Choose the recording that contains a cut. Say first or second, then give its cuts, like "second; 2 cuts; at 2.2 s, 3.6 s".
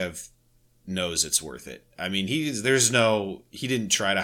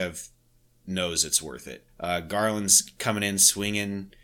second; 1 cut; at 1.9 s